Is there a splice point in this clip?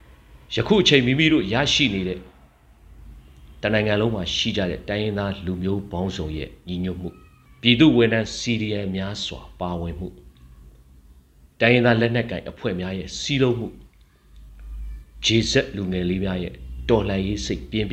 no; 0 cuts

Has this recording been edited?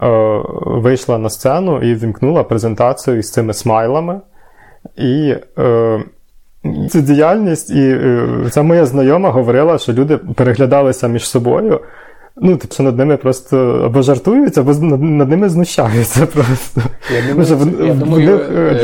yes; 2 cuts; at 6.9 s, 12.7 s

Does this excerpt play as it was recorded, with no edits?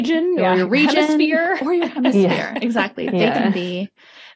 yes; 0 cuts

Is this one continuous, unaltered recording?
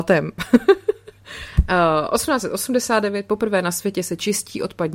yes; 0 cuts

